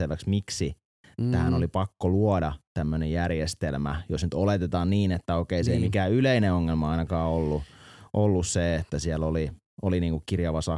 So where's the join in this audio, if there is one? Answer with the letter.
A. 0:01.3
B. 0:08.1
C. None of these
C